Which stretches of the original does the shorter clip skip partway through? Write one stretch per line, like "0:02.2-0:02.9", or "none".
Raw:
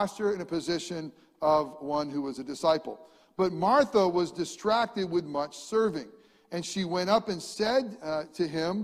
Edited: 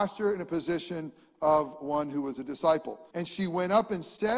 0:03.1-0:06.5